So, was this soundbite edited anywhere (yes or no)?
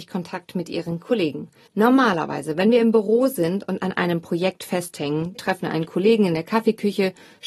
yes